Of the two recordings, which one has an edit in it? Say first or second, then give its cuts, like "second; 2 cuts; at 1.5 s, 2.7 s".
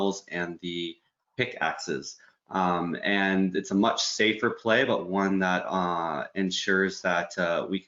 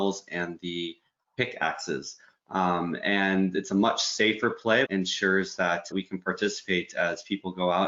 second; 2 cuts; at 4.8 s, 5.9 s